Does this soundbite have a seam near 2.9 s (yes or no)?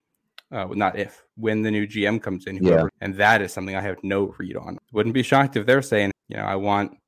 yes